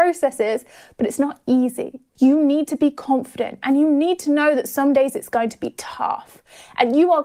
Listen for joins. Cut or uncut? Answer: cut